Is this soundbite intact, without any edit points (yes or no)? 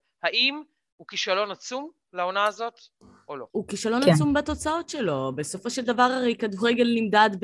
yes